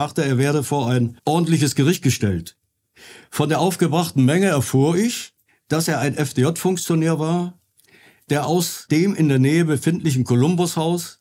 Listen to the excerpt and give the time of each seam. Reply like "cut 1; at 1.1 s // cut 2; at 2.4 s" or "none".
none